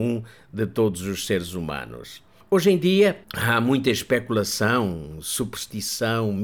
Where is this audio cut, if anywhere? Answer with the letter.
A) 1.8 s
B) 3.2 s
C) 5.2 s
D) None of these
B